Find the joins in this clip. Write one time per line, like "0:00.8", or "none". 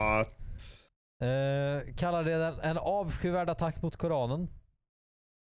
none